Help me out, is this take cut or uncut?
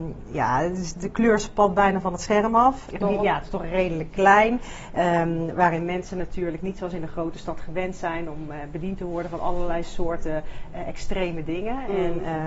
cut